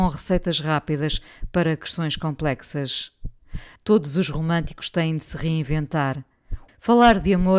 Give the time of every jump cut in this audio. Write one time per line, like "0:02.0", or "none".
0:03.8
0:06.7